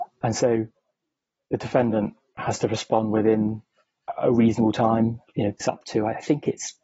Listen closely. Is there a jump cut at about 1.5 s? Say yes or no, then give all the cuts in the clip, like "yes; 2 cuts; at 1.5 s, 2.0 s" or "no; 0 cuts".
no; 1 cut; at 5.6 s